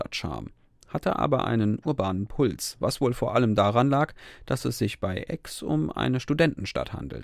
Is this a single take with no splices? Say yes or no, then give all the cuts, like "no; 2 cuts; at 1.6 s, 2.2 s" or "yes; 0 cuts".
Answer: yes; 0 cuts